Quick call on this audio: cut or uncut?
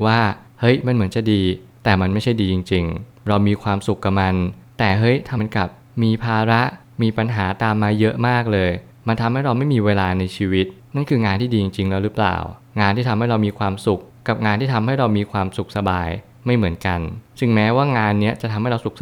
cut